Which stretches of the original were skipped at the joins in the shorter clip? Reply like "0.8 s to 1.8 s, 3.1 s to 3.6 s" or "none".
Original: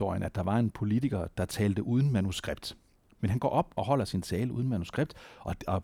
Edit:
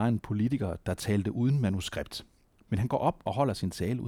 none